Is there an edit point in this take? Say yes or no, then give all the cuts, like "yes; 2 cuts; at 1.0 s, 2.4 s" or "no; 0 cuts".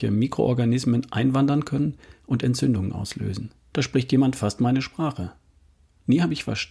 yes; 1 cut; at 3.7 s